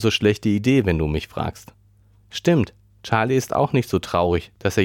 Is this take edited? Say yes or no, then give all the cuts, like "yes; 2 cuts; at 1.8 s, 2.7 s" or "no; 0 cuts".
no; 0 cuts